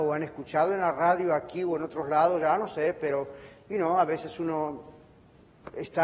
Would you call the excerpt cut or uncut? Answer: uncut